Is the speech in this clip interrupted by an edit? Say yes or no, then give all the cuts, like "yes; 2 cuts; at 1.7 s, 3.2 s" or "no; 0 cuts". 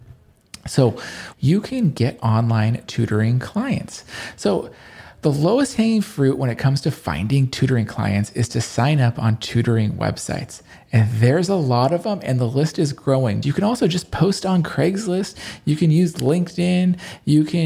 yes; 2 cuts; at 1.3 s, 13.4 s